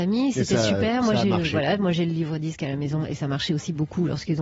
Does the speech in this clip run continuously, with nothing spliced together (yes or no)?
yes